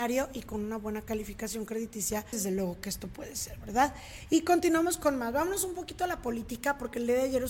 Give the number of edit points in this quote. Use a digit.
1